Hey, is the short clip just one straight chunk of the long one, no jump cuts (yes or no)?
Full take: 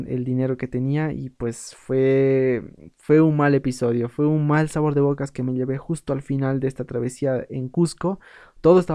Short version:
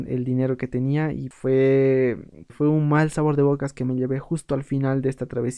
no